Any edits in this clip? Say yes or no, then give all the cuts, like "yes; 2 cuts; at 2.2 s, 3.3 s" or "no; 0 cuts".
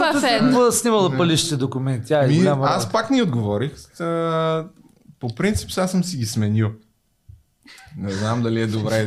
no; 0 cuts